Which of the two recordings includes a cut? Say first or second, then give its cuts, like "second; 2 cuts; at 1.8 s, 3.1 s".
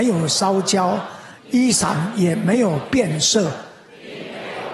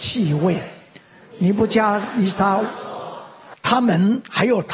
second; 1 cut; at 3.5 s